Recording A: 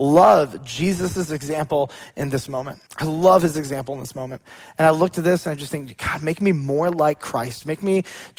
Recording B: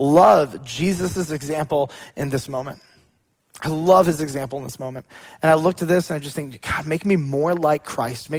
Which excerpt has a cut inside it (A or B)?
A